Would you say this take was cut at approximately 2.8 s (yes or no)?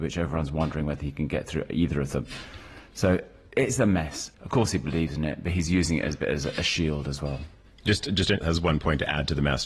no